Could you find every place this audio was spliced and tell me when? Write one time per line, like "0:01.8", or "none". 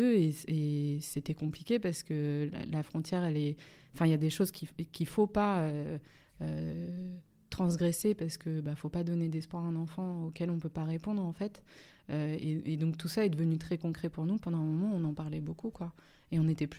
none